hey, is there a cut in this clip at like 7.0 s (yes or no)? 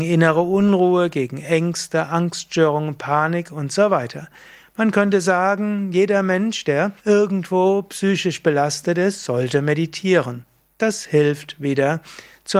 yes